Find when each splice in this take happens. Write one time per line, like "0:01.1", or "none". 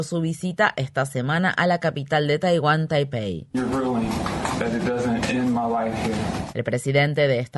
0:03.5